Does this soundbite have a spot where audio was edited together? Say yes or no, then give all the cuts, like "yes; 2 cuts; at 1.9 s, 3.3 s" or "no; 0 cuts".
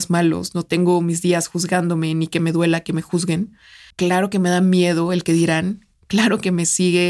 yes; 1 cut; at 3.9 s